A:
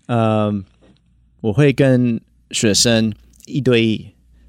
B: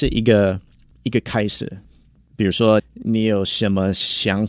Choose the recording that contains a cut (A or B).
B